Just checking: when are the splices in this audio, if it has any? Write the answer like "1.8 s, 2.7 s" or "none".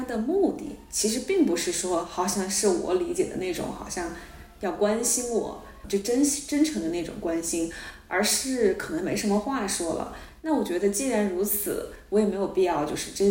none